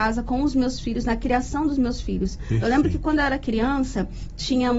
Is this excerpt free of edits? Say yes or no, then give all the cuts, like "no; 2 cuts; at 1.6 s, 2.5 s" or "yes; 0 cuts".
yes; 0 cuts